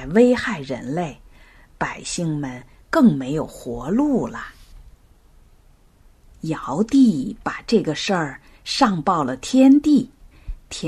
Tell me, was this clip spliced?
no; 0 cuts

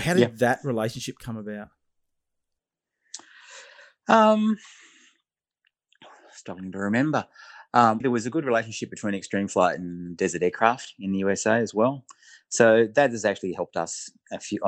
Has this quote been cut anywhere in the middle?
yes; 1 cut; at 8.0 s

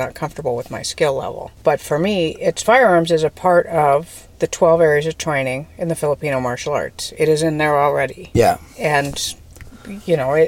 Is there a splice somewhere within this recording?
no; 0 cuts

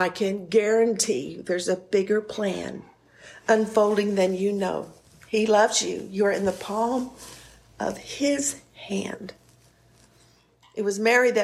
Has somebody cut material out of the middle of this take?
no; 0 cuts

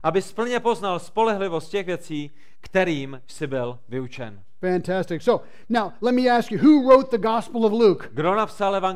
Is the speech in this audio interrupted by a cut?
no; 0 cuts

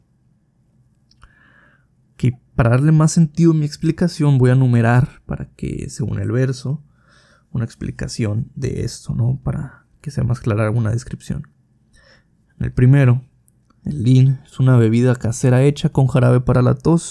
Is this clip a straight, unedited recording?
no; 1 cut; at 8.5 s

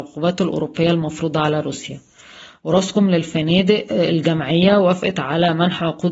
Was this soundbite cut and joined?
no; 0 cuts

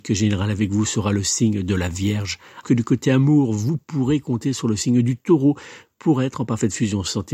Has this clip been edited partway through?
yes; 1 cut; at 2.6 s

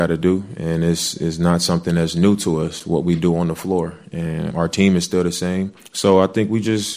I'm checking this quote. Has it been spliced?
yes; 1 cut; at 4.5 s

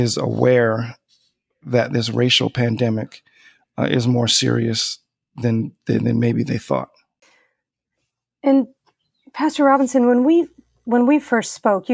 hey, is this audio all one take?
yes; 0 cuts

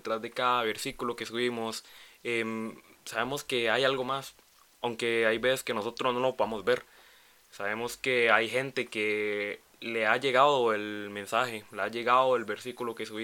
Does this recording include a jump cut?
no; 0 cuts

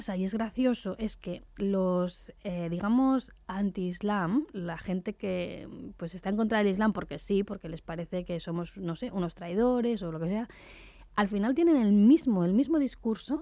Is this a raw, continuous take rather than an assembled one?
yes; 0 cuts

